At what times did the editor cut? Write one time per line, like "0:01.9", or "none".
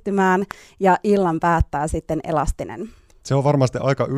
0:03.1